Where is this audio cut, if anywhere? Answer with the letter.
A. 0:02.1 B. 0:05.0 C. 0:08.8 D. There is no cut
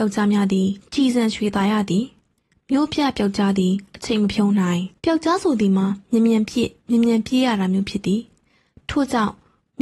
B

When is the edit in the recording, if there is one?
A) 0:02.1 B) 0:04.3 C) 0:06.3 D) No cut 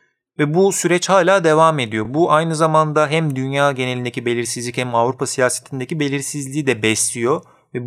D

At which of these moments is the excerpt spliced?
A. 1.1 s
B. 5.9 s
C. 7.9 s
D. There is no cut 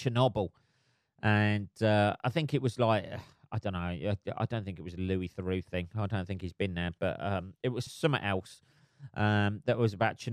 C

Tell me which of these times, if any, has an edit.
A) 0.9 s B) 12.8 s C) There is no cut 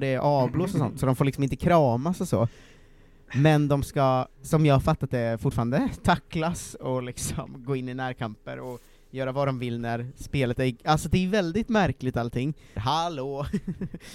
B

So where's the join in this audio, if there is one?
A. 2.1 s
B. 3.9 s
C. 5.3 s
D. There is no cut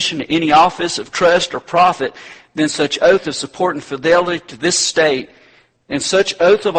D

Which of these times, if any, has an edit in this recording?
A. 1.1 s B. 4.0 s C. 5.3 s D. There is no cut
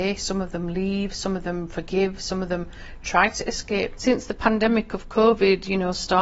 B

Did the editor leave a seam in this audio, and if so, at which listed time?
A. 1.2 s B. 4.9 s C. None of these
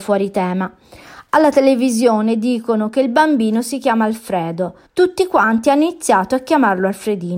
B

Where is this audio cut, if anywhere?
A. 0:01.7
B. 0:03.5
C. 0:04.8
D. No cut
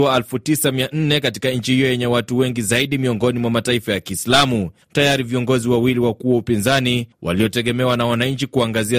C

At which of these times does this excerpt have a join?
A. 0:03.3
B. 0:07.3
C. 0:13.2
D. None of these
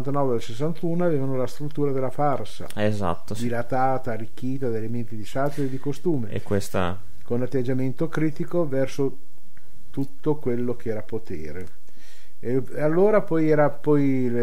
D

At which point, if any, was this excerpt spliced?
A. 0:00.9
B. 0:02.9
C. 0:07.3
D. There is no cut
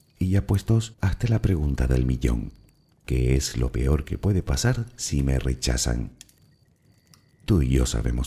A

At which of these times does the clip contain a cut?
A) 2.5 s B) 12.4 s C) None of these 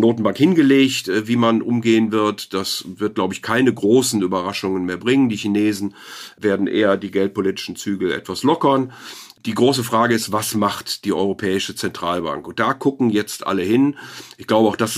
C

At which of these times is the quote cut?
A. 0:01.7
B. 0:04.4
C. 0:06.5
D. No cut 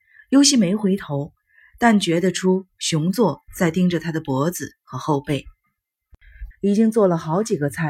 C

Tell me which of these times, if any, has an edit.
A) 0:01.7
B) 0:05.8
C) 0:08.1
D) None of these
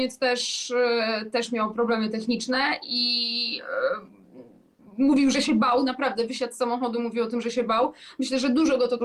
A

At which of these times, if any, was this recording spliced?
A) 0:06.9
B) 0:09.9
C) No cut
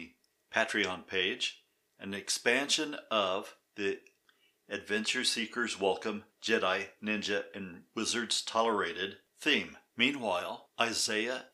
B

